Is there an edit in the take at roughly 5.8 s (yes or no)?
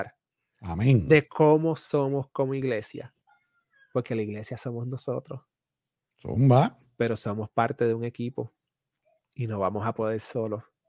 no